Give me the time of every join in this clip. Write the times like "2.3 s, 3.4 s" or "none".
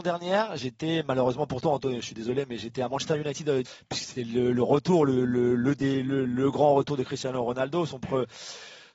3.6 s